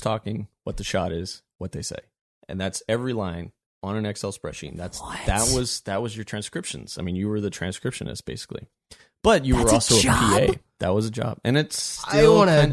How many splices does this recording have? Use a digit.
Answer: 0